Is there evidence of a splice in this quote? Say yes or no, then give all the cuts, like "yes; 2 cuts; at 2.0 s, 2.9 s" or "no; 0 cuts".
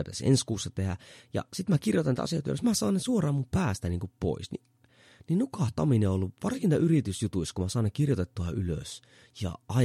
no; 0 cuts